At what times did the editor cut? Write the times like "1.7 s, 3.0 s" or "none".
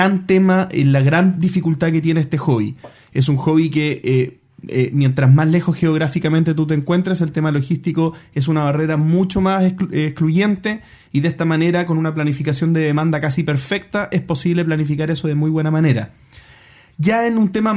none

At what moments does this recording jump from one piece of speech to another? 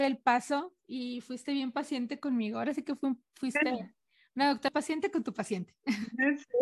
4.7 s

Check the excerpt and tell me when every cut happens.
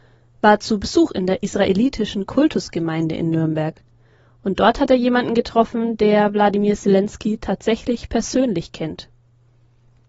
none

